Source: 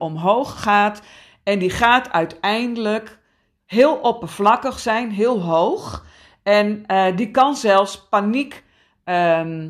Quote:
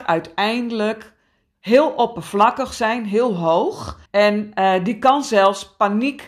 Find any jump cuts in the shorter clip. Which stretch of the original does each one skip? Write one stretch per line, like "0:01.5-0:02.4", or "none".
0:06.1-0:06.4